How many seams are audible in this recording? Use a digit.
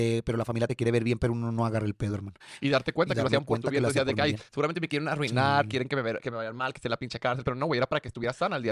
2